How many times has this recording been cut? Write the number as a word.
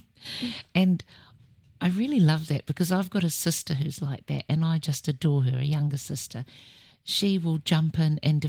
zero